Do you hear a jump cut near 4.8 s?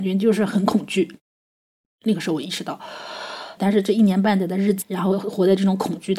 yes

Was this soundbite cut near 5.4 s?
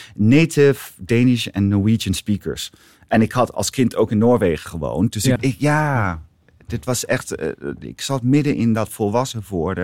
yes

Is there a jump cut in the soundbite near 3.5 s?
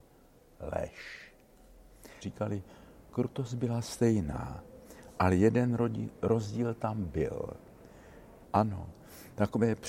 no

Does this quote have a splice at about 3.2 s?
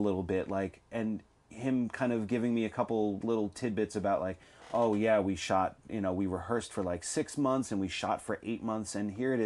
yes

